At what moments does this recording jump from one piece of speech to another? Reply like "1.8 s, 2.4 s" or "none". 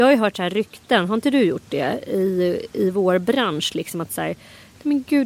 none